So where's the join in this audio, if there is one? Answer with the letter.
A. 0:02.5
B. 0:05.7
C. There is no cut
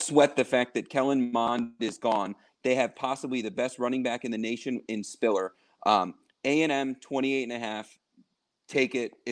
C